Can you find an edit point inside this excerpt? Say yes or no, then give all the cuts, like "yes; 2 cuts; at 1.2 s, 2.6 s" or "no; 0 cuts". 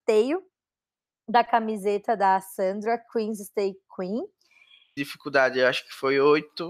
yes; 1 cut; at 5.0 s